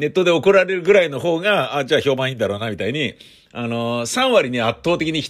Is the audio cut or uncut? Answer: uncut